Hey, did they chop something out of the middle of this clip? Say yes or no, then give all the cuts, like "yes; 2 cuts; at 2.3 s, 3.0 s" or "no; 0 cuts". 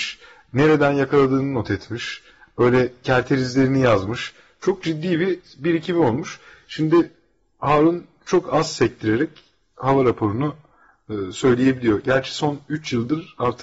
no; 0 cuts